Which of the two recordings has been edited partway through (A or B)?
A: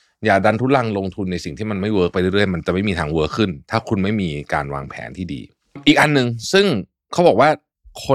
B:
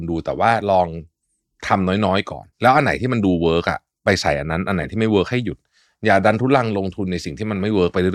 B